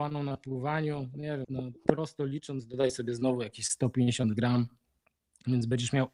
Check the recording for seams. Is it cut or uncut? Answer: cut